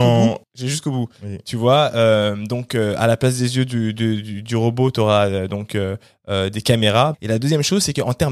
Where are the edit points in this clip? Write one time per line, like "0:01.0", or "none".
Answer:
0:07.1